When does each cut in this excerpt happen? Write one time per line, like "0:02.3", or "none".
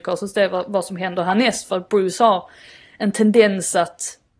none